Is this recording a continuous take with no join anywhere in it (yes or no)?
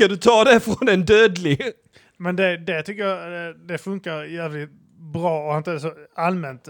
yes